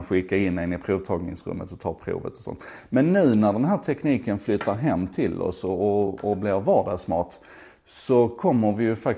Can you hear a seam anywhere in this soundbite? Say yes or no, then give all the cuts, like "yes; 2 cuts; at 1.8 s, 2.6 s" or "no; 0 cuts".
no; 0 cuts